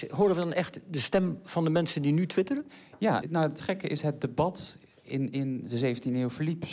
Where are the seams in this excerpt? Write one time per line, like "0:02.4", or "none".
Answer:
0:03.2

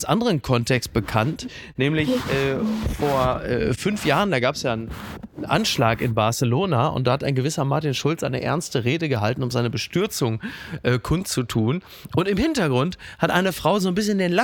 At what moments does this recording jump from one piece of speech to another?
none

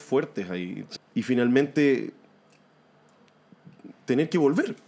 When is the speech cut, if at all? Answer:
0:00.9

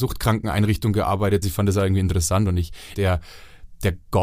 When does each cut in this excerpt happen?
0:01.4
0:02.9

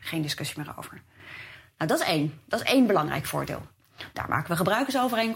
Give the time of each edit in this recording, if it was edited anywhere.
0:04.1

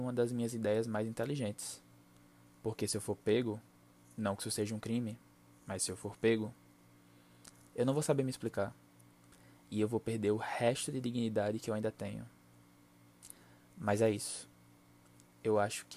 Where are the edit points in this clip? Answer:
none

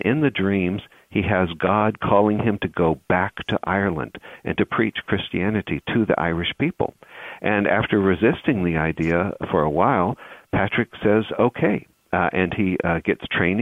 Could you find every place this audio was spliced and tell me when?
none

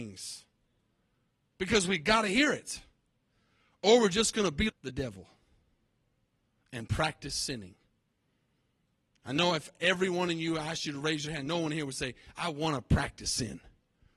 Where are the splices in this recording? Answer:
0:04.7

